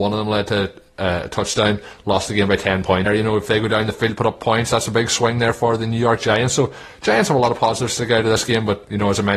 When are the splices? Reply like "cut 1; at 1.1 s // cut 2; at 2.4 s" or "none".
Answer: cut 1; at 3.1 s